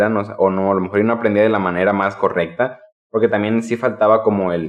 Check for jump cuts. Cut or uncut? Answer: uncut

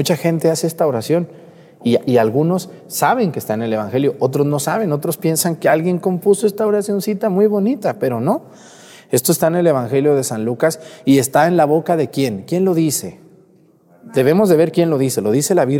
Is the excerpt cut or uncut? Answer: uncut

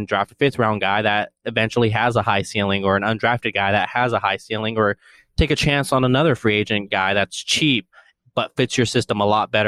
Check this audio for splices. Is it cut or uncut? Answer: uncut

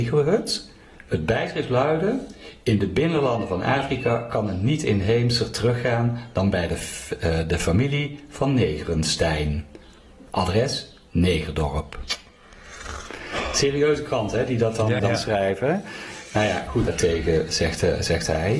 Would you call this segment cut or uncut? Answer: cut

